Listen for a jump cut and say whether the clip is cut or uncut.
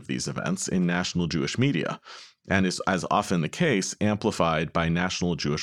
uncut